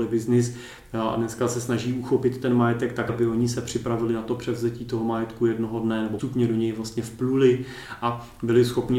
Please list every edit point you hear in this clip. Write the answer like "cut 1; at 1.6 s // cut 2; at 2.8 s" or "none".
cut 1; at 3.1 s // cut 2; at 6.2 s